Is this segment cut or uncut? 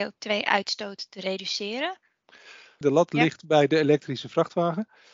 cut